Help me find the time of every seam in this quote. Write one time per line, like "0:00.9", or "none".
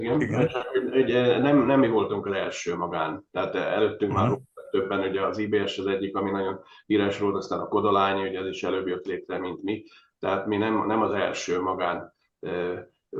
none